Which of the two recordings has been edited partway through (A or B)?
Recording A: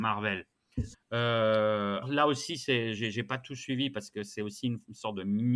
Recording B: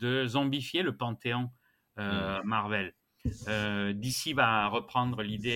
A